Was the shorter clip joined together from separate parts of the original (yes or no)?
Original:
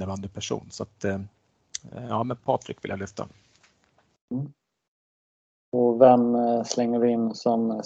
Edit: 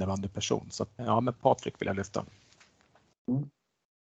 yes